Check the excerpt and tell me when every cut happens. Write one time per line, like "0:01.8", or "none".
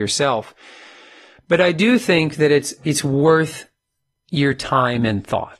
none